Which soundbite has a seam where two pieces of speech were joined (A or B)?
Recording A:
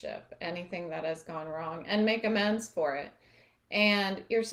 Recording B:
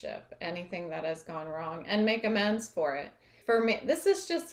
B